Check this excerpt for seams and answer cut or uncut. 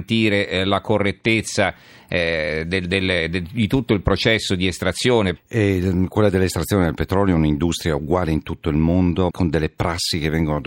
cut